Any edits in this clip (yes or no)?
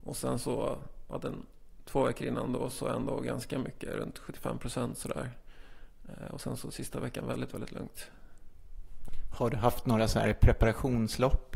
no